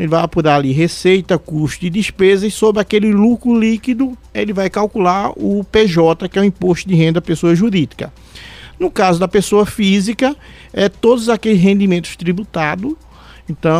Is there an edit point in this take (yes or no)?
no